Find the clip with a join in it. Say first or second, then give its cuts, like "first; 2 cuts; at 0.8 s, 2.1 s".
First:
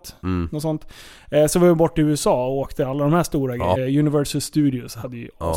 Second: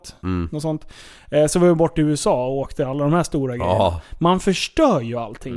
first; 1 cut; at 3.8 s